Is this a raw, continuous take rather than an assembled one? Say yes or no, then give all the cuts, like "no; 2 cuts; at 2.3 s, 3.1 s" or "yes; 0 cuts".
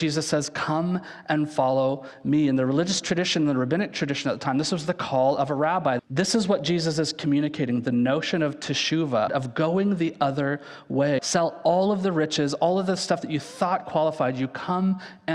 no; 3 cuts; at 6.0 s, 9.3 s, 11.2 s